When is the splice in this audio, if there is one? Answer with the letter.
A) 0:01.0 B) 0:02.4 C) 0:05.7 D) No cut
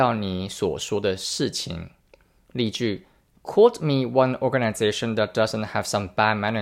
D